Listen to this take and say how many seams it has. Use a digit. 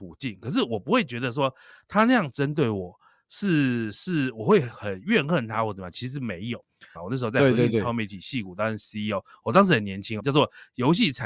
2